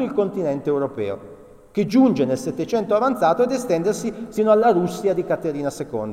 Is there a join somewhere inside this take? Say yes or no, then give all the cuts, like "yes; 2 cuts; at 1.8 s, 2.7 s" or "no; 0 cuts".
no; 0 cuts